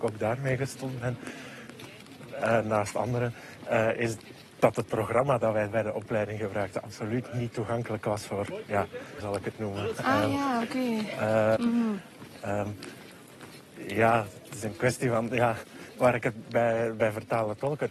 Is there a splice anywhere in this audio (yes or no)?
yes